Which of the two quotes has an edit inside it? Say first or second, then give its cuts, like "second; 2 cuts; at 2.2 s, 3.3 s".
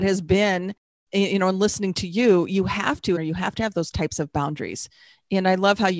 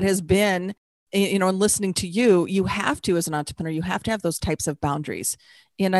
first; 1 cut; at 3.2 s